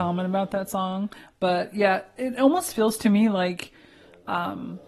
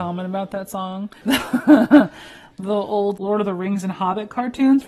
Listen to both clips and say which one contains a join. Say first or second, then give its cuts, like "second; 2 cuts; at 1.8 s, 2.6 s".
second; 2 cuts; at 1.2 s, 3.2 s